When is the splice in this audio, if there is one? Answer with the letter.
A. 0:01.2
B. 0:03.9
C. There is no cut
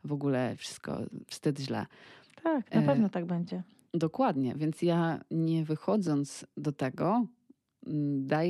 C